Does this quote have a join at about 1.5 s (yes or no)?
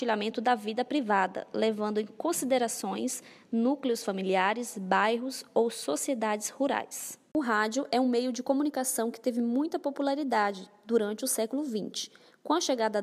no